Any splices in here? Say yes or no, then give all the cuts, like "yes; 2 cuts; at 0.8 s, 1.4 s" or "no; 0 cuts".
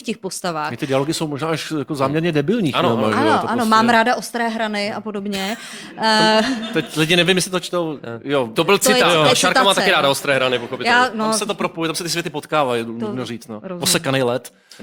no; 0 cuts